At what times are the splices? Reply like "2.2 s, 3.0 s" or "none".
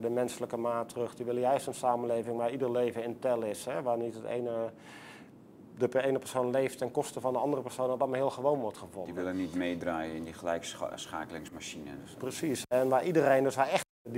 none